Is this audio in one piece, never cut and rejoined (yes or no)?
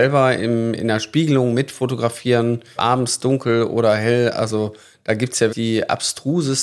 no